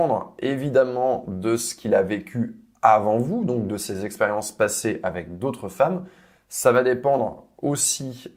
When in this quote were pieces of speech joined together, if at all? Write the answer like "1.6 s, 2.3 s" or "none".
none